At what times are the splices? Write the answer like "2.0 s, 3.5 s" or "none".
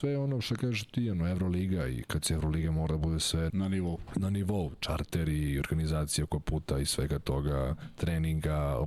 3.5 s